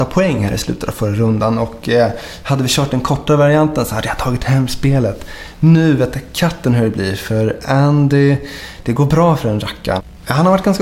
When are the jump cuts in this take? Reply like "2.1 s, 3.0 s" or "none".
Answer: none